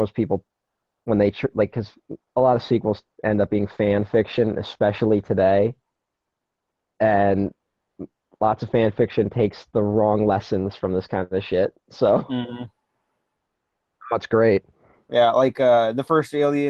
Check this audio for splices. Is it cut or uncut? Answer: cut